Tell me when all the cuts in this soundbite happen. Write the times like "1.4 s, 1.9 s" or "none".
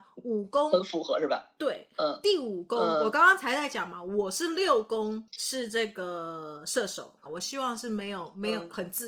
7.2 s

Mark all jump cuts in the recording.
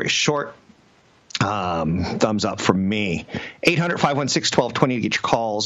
none

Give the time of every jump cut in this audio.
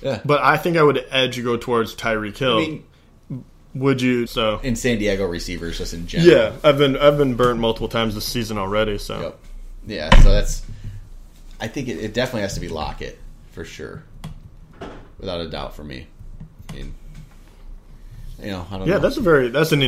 4.3 s

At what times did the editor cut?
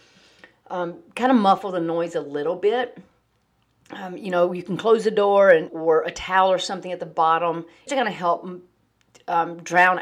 5.7 s, 7.9 s

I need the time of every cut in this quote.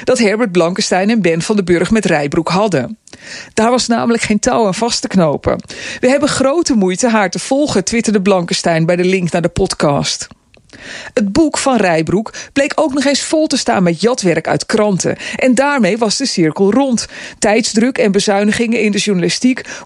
17.4 s

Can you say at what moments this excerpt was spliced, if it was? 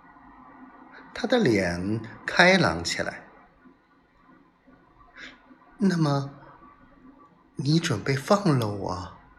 none

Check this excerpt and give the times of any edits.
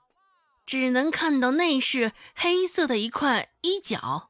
none

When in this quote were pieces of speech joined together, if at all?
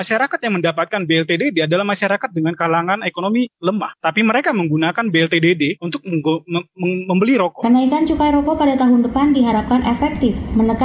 none

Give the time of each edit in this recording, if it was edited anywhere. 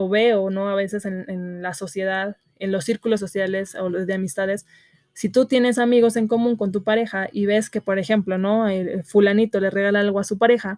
none

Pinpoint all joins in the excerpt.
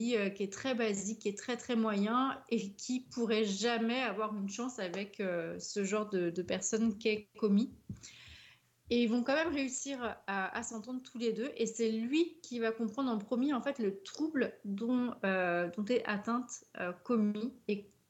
none

